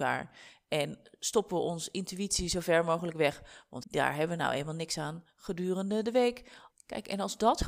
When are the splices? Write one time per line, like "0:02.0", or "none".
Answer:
0:03.8
0:06.7